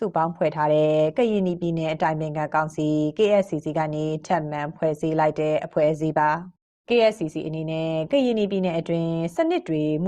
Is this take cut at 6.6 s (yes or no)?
no